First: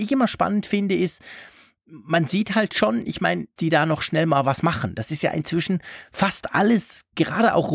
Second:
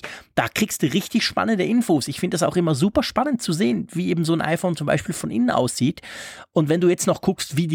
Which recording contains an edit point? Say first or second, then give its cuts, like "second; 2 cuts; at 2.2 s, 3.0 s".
first; 1 cut; at 3.6 s